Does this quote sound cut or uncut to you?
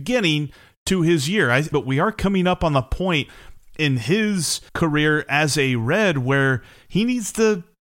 cut